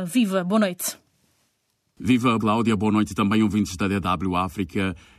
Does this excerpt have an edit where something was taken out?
yes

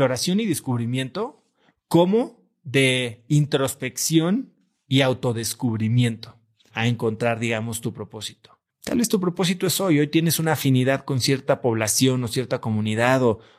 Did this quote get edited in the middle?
yes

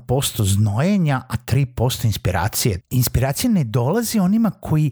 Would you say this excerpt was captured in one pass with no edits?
no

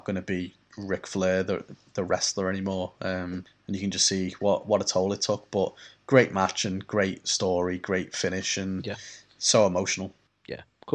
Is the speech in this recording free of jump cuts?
yes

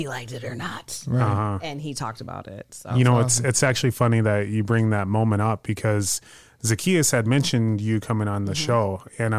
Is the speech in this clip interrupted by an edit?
no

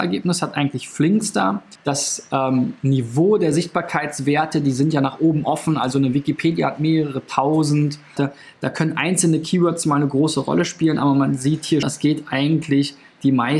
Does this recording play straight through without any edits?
no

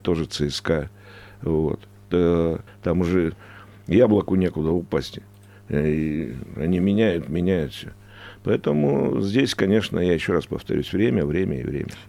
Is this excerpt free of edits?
no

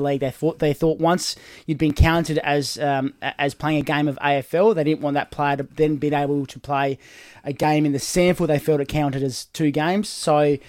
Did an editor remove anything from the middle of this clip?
no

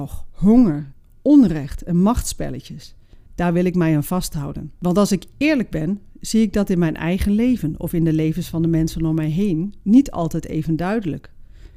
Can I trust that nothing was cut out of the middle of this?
no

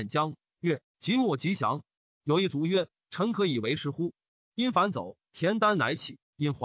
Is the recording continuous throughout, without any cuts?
no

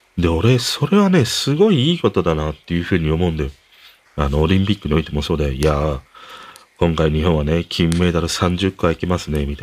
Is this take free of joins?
no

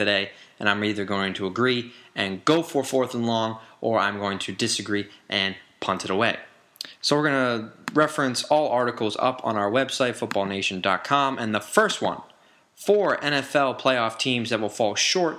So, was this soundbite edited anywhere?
no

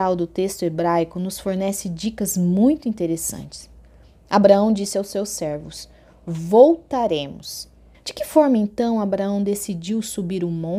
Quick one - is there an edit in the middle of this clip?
yes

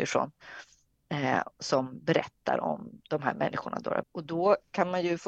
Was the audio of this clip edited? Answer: yes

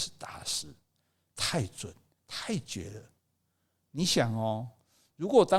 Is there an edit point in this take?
yes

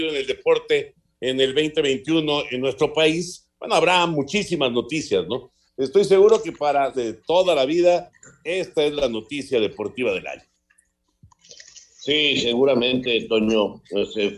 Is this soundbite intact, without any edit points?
no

